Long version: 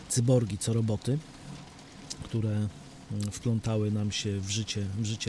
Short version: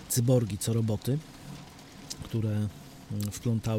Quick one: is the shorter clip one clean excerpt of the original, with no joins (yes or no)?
yes